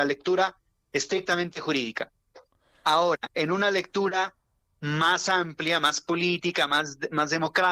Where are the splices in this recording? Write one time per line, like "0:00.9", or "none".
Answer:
none